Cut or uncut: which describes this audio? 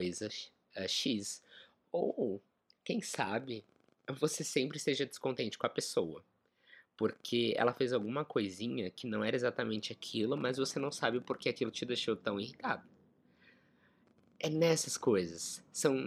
uncut